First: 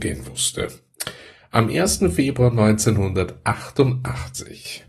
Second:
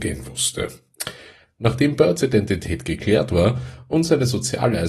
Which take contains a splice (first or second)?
second